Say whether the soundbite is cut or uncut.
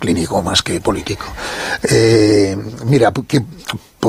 uncut